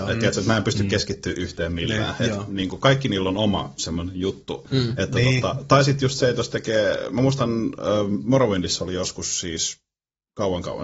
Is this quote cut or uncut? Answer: cut